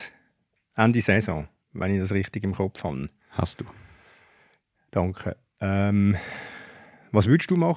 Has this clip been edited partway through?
no; 0 cuts

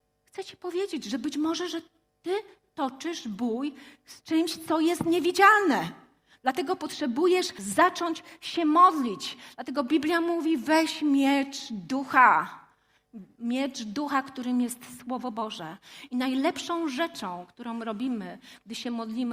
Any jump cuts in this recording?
no; 0 cuts

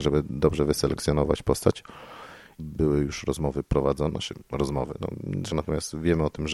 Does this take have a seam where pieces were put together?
yes; 2 cuts; at 2.6 s, 5.5 s

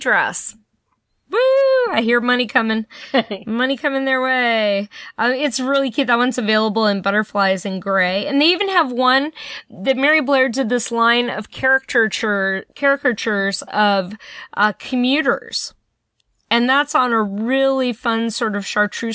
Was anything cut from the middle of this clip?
no; 0 cuts

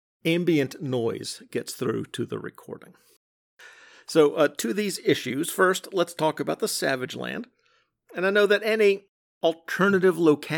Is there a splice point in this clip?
no; 0 cuts

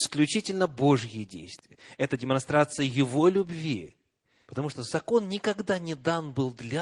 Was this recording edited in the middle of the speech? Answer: yes; 1 cut; at 4.4 s

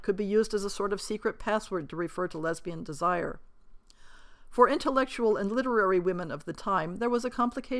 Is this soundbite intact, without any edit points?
yes; 0 cuts

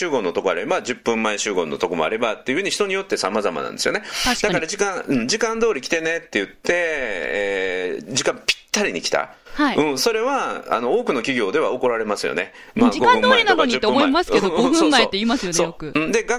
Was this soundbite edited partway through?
no; 0 cuts

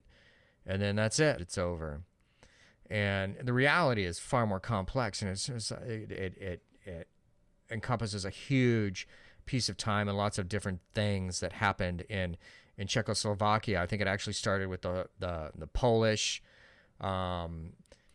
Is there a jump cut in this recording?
yes; 1 cut; at 1.4 s

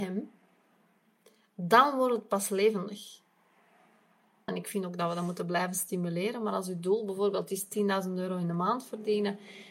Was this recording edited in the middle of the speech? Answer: yes; 1 cut; at 4.5 s

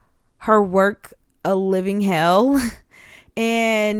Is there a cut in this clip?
no; 0 cuts

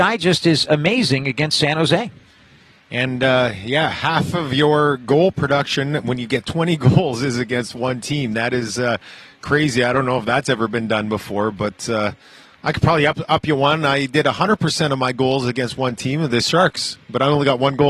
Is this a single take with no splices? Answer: yes; 0 cuts

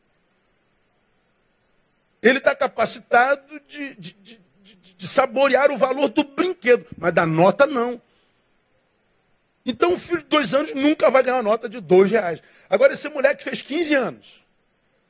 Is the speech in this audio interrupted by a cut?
no; 0 cuts

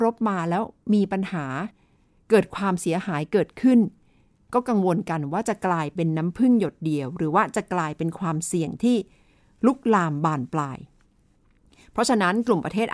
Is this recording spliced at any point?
no; 0 cuts

